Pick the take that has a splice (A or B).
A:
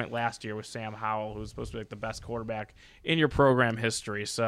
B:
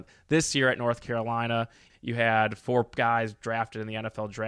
B